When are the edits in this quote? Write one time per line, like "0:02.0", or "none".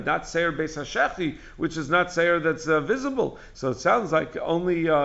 0:03.5